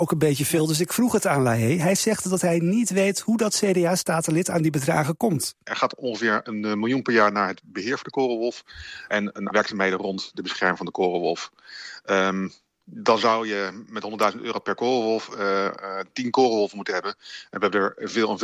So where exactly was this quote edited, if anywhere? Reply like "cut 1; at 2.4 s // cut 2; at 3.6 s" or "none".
cut 1; at 9.5 s